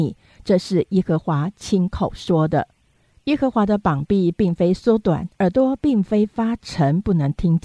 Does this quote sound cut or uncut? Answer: cut